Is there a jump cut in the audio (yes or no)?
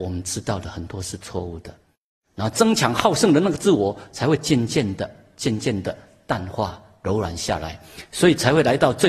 no